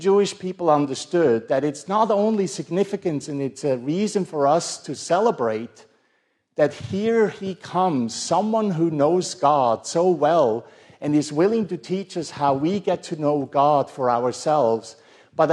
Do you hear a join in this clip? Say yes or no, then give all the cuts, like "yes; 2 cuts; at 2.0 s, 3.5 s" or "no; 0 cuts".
no; 0 cuts